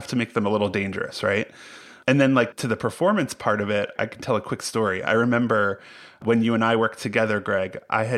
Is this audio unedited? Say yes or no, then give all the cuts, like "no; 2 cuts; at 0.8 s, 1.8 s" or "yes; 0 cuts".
yes; 0 cuts